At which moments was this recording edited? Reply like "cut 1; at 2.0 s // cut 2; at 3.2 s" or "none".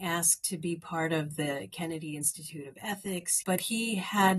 cut 1; at 3.4 s